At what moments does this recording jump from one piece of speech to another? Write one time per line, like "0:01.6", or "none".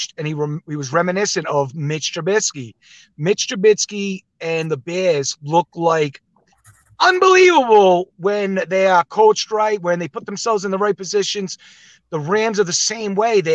none